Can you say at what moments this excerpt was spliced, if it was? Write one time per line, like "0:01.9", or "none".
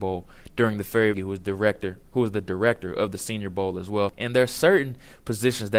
0:01.1
0:04.1